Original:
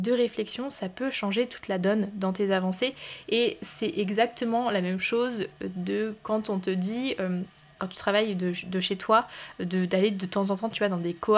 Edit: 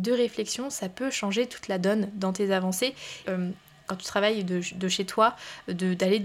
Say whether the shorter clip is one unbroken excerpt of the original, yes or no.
no